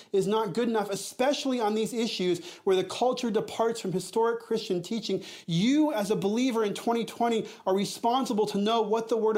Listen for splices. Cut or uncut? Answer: uncut